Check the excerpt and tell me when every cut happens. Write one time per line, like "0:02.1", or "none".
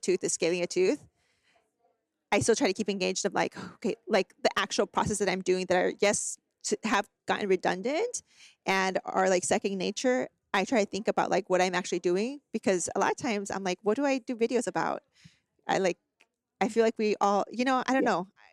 none